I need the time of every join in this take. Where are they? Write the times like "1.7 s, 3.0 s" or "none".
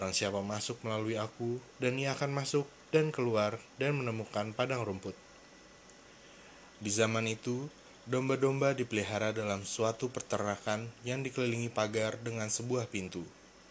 1.7 s, 6.7 s